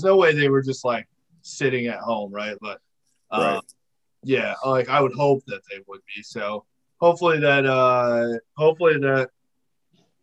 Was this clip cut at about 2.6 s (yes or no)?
yes